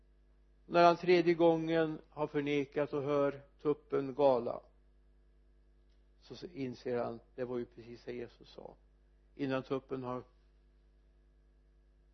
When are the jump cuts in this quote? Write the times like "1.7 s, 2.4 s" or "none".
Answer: none